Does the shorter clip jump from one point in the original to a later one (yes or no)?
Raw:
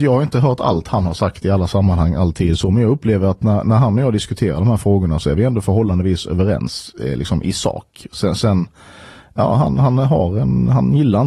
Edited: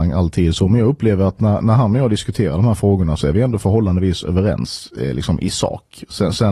no